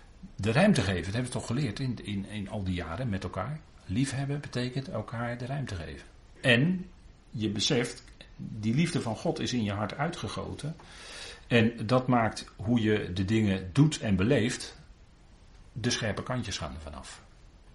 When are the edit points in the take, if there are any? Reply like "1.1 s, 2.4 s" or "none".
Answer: 6.4 s